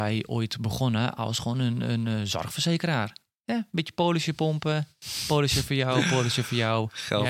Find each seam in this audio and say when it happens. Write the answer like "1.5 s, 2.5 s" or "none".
none